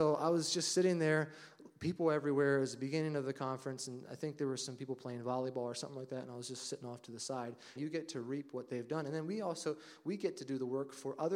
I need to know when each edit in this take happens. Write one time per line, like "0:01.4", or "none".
0:07.8